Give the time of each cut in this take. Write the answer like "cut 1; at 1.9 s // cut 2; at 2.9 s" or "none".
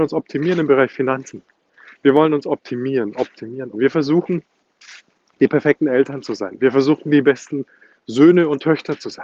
cut 1; at 3.7 s